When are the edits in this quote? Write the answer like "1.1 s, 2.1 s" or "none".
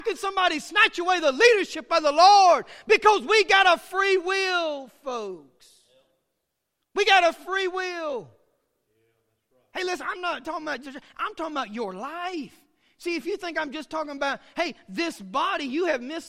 10.8 s